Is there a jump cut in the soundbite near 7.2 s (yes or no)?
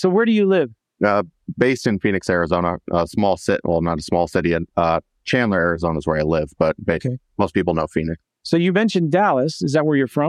no